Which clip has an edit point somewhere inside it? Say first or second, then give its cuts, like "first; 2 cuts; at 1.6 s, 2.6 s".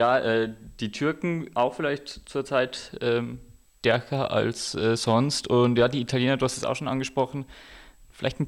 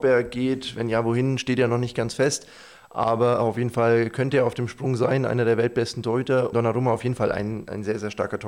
second; 1 cut; at 6.5 s